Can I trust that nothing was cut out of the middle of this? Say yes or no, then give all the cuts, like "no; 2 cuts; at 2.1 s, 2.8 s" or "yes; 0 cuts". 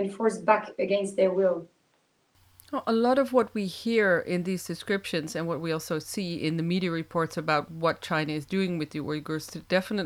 yes; 0 cuts